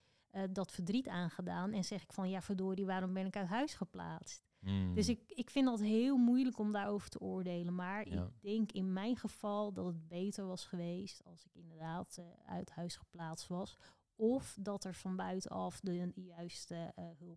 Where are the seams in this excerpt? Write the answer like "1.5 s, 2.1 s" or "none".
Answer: none